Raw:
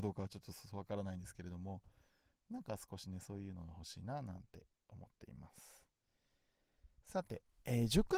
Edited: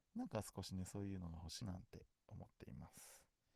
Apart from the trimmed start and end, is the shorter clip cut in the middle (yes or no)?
yes